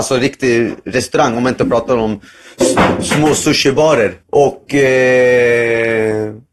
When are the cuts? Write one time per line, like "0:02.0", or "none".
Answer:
0:04.2